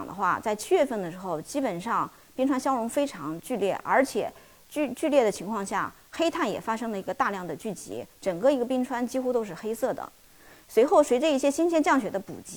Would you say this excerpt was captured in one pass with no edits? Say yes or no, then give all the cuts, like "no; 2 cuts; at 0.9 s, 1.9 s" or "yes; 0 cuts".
yes; 0 cuts